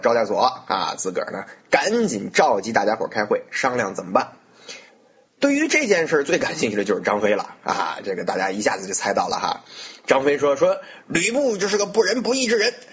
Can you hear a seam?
no; 0 cuts

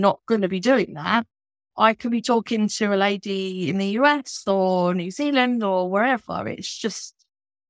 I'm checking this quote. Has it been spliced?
no; 0 cuts

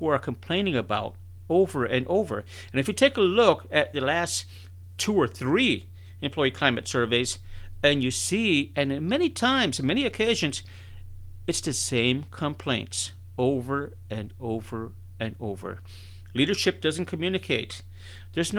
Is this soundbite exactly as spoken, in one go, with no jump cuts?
no; 1 cut; at 3.9 s

